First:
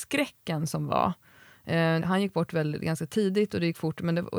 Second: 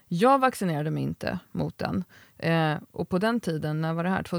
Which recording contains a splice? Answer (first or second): first